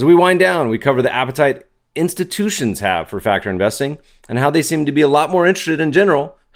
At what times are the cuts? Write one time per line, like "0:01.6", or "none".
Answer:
none

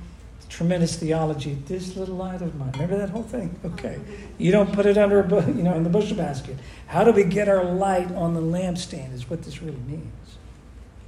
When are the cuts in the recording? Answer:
0:05.7

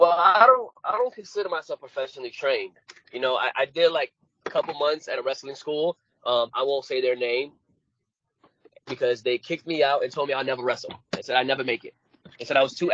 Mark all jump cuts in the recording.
none

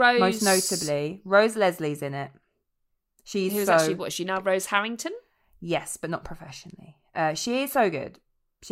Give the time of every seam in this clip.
none

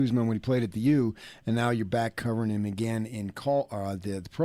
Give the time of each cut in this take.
none

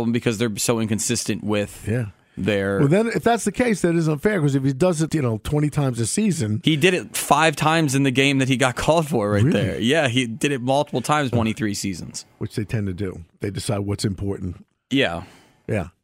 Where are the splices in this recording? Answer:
0:05.1
0:11.3

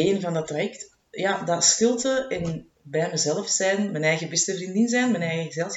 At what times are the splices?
none

